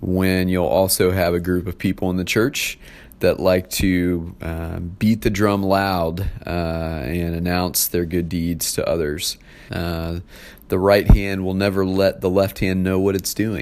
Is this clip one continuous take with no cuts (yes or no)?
no